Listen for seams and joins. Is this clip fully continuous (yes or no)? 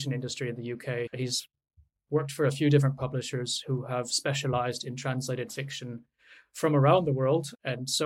yes